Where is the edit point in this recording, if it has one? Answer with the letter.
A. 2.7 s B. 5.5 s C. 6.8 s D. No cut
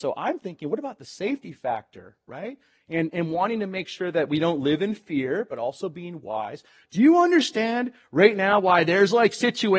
D